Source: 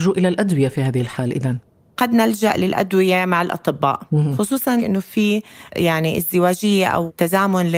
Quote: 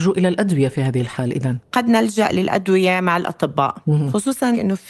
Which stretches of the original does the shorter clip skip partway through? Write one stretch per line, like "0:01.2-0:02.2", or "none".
0:01.7-0:01.9